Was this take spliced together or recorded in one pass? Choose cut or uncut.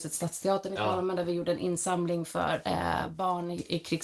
uncut